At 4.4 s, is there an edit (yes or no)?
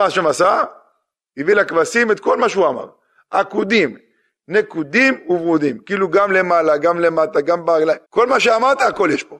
no